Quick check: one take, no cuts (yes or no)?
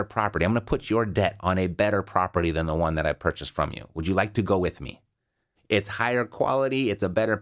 no